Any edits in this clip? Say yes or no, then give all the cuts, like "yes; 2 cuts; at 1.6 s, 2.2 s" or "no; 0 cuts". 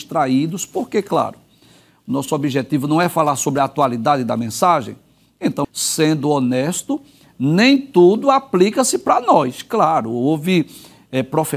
yes; 1 cut; at 5.6 s